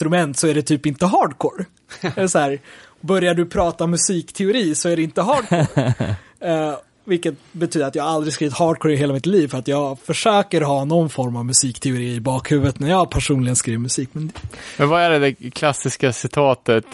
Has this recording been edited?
no; 0 cuts

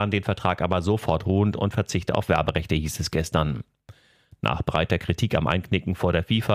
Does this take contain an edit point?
no; 0 cuts

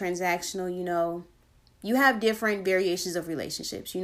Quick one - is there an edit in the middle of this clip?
no; 0 cuts

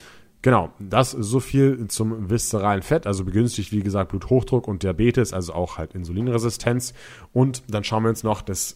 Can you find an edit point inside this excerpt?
no; 0 cuts

